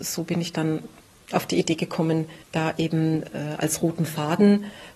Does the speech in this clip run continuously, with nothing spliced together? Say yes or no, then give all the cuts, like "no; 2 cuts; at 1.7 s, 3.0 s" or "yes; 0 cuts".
yes; 0 cuts